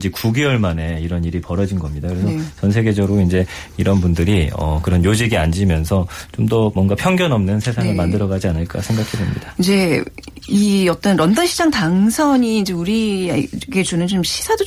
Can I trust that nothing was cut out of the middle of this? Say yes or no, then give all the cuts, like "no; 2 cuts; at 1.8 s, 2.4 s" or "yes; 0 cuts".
yes; 0 cuts